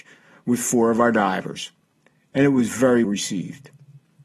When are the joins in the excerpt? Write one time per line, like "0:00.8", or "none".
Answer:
0:03.0